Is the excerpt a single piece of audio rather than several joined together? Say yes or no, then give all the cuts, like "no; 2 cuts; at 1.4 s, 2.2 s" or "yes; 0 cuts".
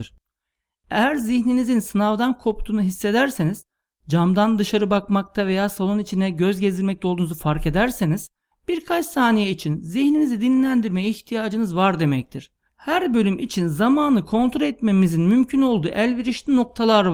no; 2 cuts; at 8.5 s, 12.7 s